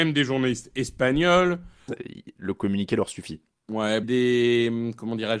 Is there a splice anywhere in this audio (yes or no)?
yes